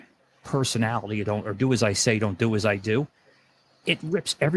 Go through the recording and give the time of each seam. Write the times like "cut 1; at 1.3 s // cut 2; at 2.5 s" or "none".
cut 1; at 1.2 s